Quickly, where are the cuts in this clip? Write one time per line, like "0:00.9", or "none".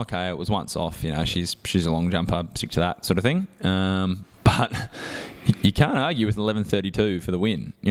0:04.3